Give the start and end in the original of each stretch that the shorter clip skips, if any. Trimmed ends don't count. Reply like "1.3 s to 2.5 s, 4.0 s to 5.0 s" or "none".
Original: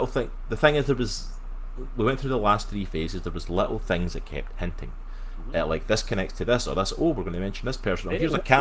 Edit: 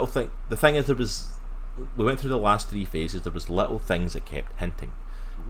none